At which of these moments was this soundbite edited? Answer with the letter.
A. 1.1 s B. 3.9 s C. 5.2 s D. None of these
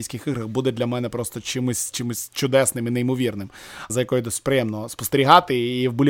B